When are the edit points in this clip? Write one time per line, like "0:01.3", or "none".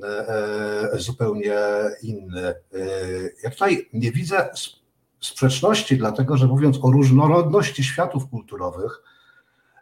none